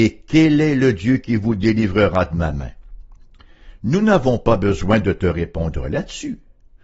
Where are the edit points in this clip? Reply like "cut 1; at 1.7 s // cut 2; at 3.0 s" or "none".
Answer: cut 1; at 3.8 s